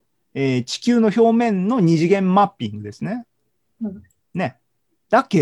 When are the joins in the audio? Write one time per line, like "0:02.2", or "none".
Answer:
0:03.7